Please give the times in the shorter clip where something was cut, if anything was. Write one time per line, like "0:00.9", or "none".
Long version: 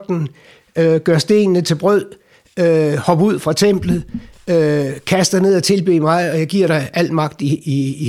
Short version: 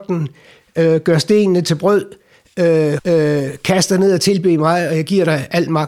0:03.0